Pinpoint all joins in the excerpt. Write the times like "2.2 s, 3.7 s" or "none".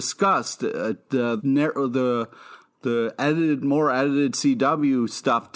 1.4 s